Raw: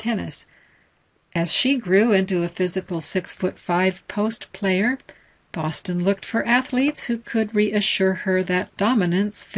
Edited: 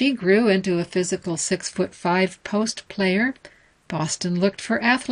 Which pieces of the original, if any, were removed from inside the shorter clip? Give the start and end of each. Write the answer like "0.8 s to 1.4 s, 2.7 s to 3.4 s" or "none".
none